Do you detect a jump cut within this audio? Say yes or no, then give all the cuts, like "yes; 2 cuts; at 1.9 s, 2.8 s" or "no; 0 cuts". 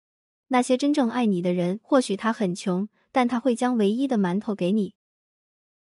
no; 0 cuts